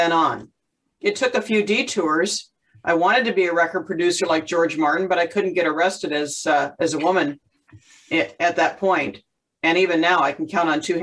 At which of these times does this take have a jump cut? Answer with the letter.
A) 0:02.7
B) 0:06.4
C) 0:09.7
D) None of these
D